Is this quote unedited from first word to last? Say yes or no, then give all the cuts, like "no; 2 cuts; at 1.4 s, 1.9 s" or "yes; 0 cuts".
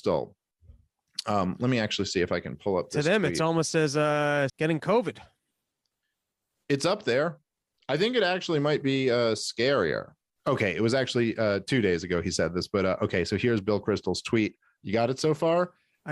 no; 2 cuts; at 4.5 s, 14.8 s